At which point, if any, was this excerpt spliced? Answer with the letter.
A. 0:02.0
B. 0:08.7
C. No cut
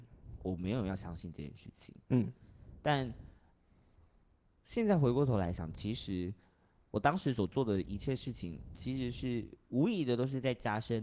B